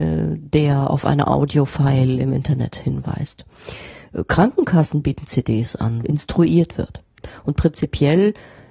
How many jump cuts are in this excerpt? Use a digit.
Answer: 1